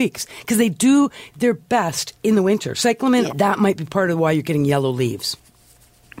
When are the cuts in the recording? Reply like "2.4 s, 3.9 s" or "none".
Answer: 3.3 s

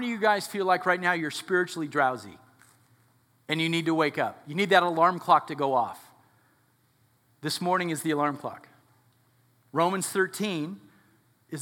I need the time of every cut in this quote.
none

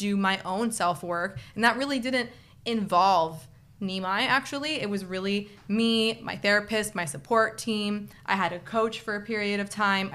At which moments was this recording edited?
none

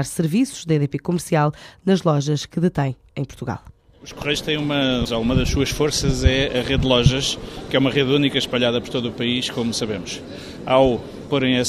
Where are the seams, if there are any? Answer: 5.1 s

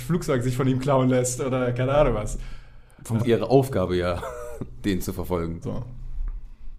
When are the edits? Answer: 3.2 s, 5.6 s

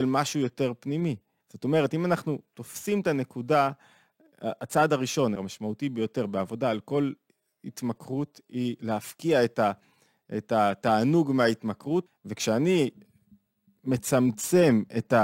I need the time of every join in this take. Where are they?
1.4 s, 5.4 s, 12.1 s

